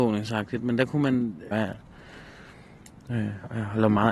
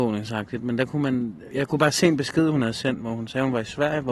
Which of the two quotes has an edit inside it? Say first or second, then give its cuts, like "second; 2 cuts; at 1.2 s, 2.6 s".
first; 1 cut; at 1.5 s